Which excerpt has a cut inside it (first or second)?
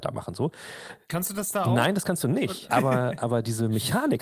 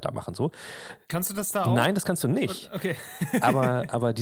first